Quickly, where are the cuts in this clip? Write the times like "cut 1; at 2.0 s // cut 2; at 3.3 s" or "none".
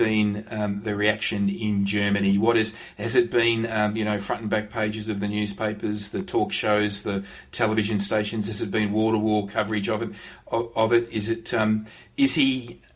none